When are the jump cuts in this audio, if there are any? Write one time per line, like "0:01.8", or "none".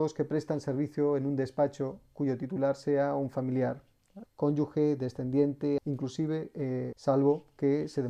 0:04.2
0:05.8
0:06.9